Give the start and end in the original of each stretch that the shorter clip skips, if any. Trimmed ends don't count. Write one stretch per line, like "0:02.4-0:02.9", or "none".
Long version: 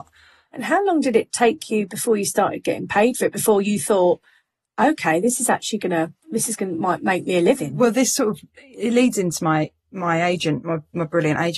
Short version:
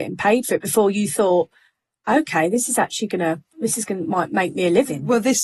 none